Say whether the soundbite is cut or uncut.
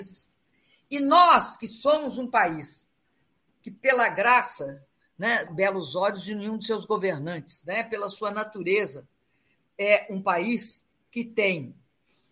cut